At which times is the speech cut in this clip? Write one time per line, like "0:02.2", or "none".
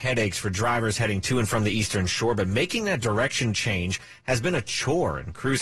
none